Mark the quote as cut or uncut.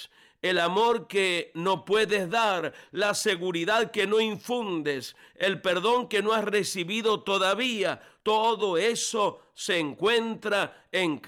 uncut